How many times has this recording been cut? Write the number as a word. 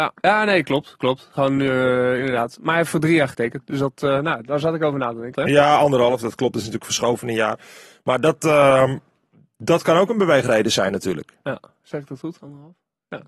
one